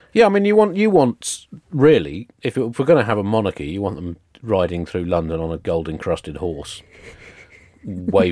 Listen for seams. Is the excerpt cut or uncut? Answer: uncut